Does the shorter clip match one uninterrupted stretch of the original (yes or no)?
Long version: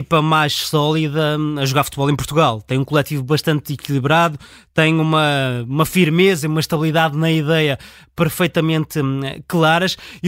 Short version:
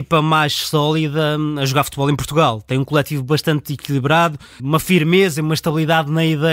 no